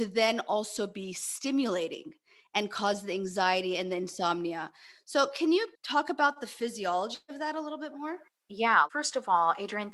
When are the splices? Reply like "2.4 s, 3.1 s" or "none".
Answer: 5.7 s